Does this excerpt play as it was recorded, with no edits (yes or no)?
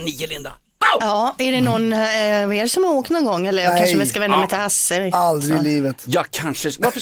yes